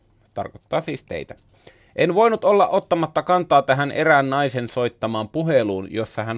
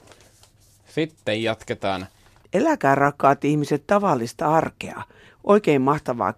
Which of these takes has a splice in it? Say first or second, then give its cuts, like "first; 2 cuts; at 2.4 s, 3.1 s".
second; 2 cuts; at 2.4 s, 5.3 s